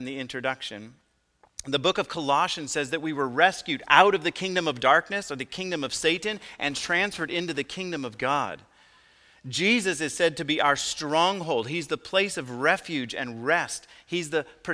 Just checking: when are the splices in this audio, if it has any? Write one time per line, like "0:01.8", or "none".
none

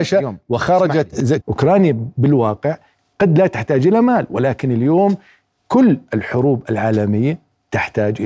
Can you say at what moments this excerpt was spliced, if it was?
0:01.4

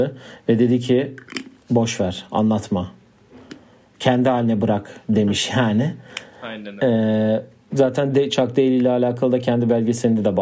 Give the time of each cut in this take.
none

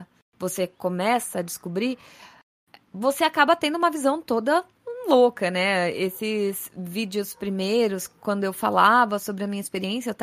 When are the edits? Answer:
none

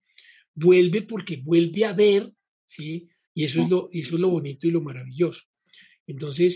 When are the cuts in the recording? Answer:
0:03.3

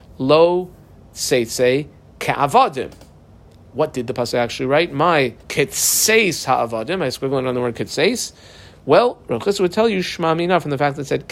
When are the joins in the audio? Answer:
0:05.4

